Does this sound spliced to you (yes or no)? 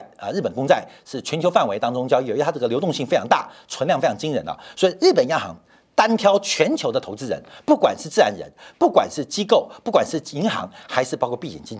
no